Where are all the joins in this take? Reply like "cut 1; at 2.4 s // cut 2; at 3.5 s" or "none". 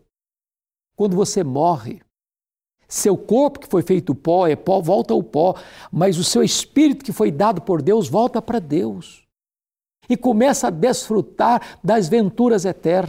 none